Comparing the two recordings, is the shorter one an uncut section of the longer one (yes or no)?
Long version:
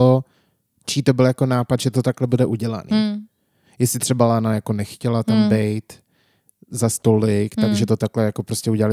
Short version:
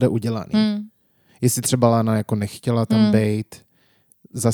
yes